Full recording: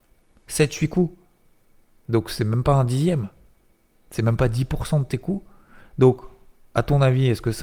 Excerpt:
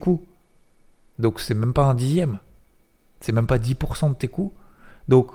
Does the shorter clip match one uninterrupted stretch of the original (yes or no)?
yes